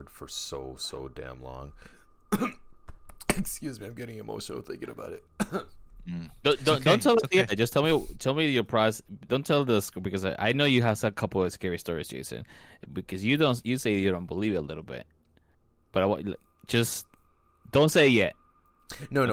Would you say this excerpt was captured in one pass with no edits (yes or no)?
yes